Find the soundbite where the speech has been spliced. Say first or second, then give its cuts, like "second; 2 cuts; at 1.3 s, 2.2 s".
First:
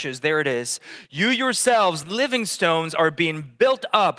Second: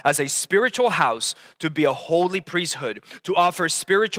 first; 1 cut; at 2.0 s